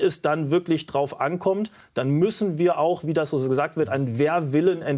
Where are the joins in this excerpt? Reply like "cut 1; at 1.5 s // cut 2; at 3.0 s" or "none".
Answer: none